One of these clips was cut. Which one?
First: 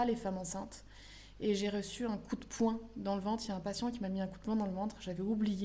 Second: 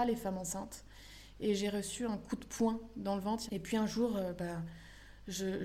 second; 1 cut; at 3.5 s

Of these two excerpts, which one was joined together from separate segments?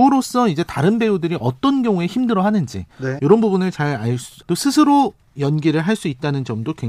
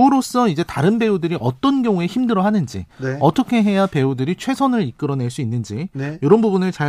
first; 2 cuts; at 3.2 s, 4.4 s

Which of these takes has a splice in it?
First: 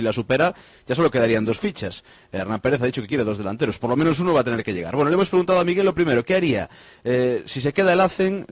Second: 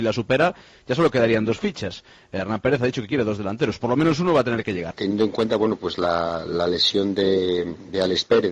second; 1 cut; at 4.9 s

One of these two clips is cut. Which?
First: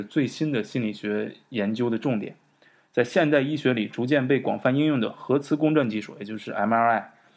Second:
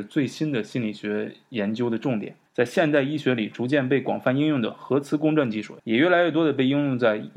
second; 2 cuts; at 2.5 s, 5.8 s

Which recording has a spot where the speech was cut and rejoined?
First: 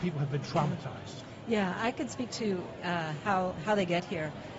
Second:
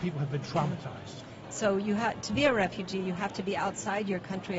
second; 1 cut; at 1.4 s

